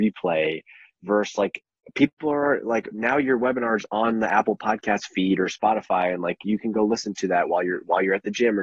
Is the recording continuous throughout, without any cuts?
yes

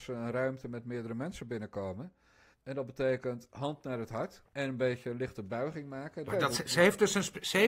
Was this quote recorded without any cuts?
no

